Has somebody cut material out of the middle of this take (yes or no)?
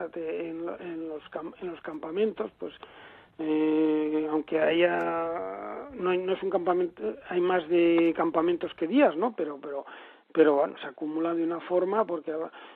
yes